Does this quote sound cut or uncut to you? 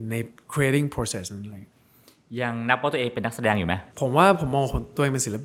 cut